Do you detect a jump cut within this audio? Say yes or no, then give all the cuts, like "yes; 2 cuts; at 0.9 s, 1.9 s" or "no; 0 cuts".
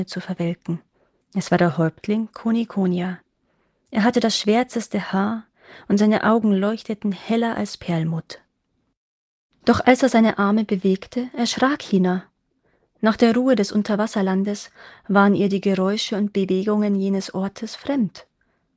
yes; 1 cut; at 1.2 s